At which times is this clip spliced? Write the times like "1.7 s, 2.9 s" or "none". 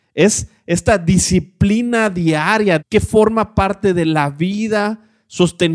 2.8 s

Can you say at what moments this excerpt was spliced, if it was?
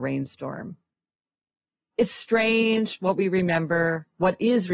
none

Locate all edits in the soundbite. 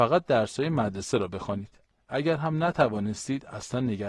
1.9 s

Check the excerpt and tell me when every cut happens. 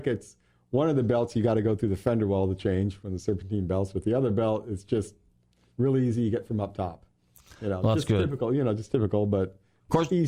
none

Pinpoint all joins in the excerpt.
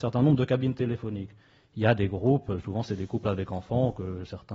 none

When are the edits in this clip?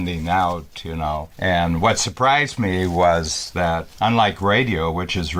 none

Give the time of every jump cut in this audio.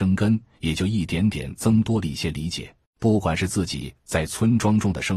2.9 s

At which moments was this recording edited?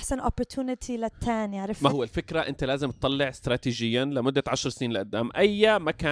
1.9 s

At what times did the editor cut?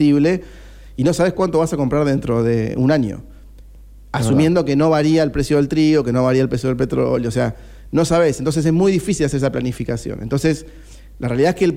none

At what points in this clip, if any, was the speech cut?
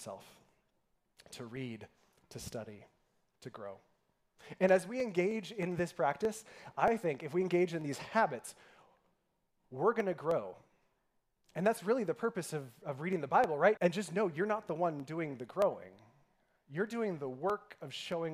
13.8 s

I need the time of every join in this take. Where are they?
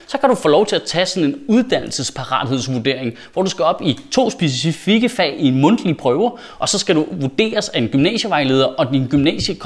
none

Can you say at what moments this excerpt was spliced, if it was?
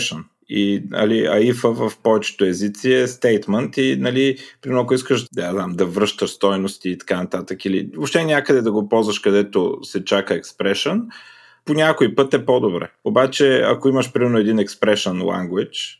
5.3 s, 13.0 s

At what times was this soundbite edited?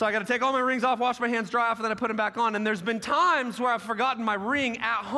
none

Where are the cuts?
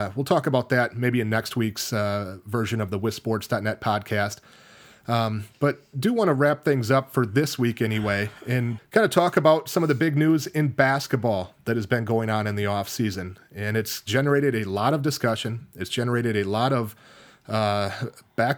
8.8 s

